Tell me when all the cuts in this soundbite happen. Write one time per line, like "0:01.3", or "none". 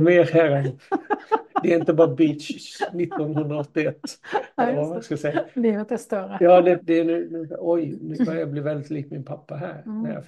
0:06.8

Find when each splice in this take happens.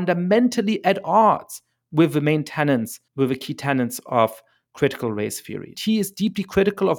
0:03.1
0:05.7

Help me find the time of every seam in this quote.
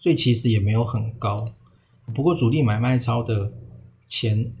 none

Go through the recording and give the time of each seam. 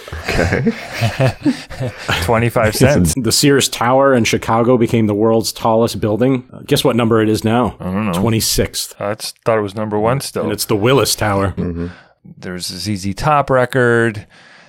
0:03.1
0:11.6

